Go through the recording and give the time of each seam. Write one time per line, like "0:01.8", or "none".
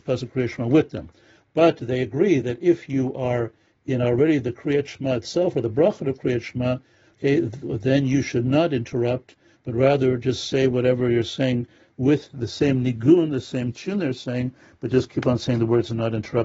none